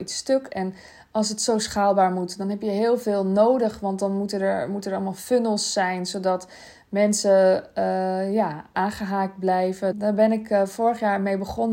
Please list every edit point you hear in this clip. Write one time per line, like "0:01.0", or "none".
0:08.7
0:09.9